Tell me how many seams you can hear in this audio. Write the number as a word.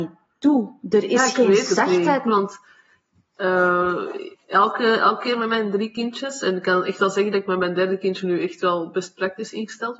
one